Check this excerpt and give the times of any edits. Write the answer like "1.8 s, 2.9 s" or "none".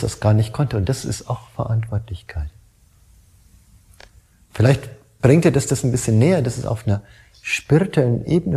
none

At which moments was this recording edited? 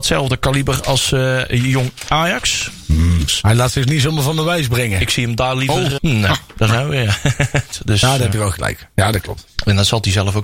3.3 s, 6.0 s, 7.7 s

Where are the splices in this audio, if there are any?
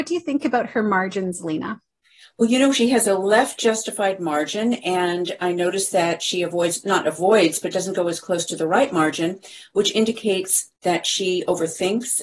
none

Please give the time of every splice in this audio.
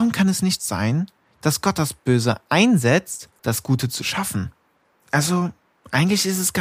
3.4 s, 4.9 s

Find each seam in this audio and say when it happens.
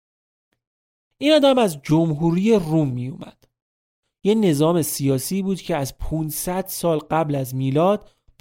4.1 s

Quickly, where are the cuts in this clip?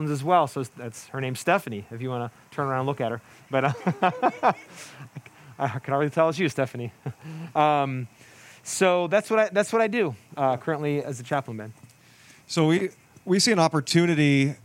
11.0 s

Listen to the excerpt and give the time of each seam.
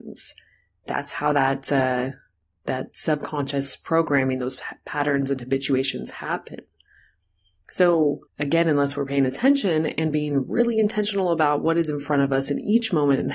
8.3 s

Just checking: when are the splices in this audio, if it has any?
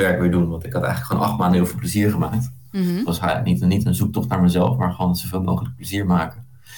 none

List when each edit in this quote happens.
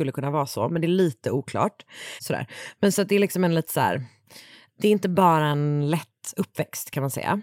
2.2 s

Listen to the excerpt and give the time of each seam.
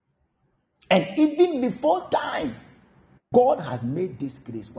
3.3 s

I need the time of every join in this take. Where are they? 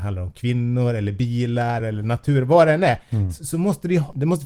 1.8 s

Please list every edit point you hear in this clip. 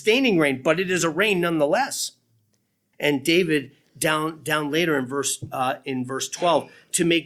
2.9 s

